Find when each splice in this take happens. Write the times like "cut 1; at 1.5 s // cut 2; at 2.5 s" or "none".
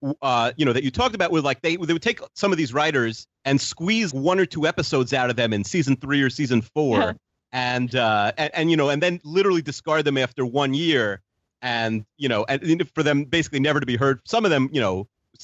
cut 1; at 4.1 s